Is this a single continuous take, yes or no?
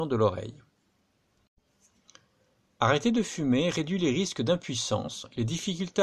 yes